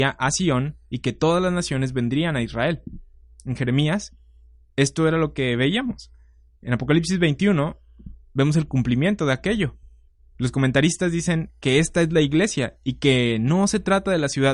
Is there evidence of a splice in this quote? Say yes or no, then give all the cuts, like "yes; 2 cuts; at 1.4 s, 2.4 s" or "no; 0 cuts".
no; 0 cuts